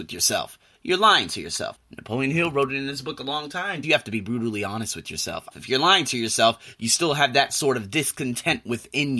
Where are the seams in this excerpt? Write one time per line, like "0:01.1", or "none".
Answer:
0:01.7
0:03.8
0:05.5